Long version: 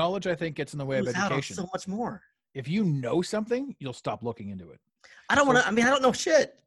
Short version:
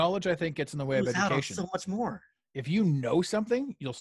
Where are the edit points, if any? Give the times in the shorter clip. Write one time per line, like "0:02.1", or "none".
none